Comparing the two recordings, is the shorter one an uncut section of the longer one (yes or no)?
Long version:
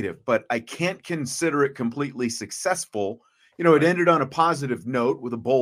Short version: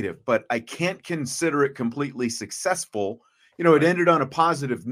yes